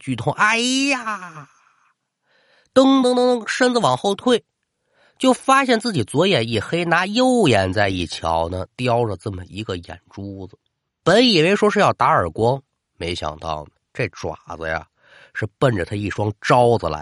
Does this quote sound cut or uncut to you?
cut